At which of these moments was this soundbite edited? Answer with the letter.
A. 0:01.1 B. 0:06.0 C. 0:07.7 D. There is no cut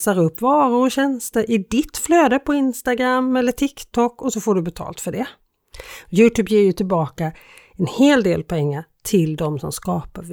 B